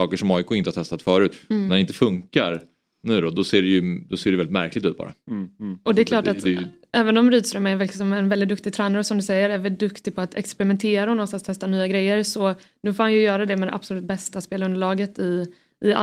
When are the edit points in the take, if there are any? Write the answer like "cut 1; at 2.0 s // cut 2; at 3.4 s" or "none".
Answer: none